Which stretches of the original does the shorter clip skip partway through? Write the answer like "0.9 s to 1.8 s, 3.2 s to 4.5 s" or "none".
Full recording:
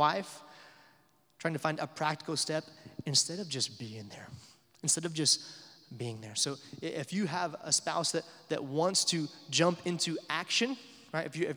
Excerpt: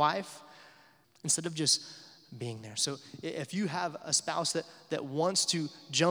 1.0 s to 4.6 s